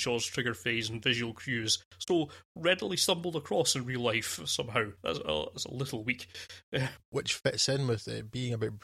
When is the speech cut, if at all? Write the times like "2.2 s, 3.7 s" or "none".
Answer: 7.0 s